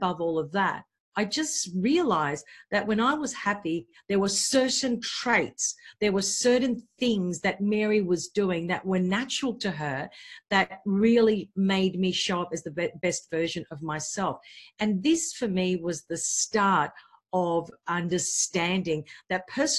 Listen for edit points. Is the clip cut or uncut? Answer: uncut